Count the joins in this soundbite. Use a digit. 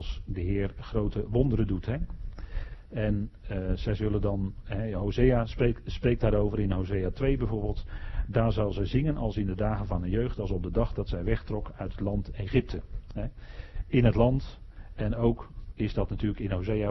0